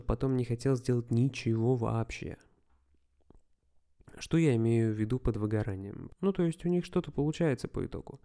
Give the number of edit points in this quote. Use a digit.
1